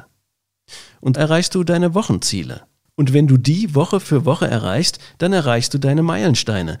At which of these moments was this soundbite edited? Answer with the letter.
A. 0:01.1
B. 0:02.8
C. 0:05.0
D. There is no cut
A